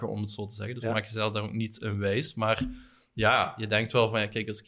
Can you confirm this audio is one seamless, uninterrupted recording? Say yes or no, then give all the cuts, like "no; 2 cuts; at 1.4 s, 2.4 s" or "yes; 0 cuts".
yes; 0 cuts